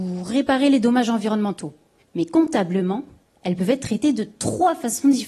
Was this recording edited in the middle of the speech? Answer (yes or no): yes